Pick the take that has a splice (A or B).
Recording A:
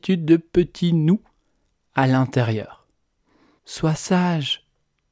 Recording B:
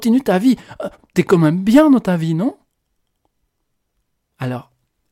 A